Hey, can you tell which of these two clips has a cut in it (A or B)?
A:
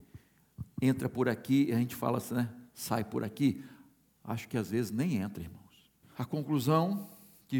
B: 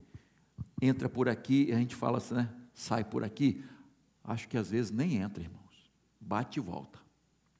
A